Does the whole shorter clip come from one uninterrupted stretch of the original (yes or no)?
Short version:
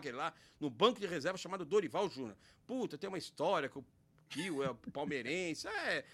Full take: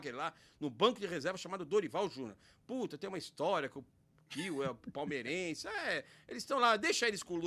yes